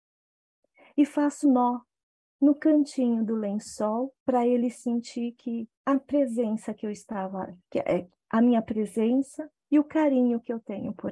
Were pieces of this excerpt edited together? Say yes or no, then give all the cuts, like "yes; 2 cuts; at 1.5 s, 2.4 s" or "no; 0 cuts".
yes; 3 cuts; at 1.4 s, 4.2 s, 5.7 s